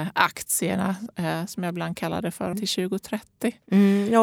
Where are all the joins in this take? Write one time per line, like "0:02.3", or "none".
0:02.5